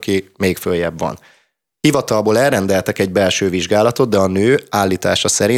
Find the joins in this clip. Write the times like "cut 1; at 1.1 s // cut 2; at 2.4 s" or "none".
none